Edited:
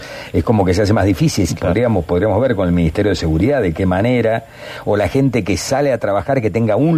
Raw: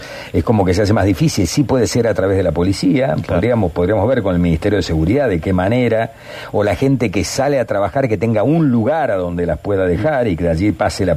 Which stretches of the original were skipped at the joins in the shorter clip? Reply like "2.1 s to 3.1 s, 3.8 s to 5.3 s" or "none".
1.5 s to 3.2 s